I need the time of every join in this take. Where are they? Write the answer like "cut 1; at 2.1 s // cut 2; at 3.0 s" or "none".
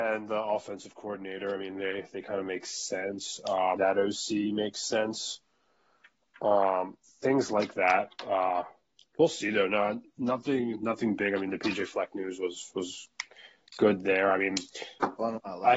cut 1; at 3.8 s